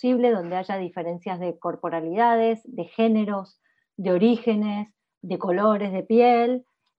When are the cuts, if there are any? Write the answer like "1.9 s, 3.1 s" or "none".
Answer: none